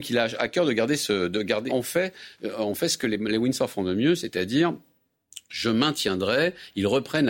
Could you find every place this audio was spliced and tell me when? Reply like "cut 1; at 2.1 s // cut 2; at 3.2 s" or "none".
cut 1; at 1.7 s